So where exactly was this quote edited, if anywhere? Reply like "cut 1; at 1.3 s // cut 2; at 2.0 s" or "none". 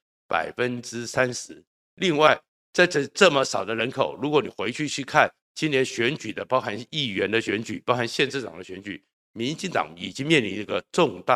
none